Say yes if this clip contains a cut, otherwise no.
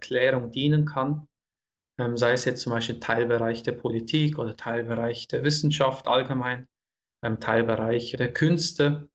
no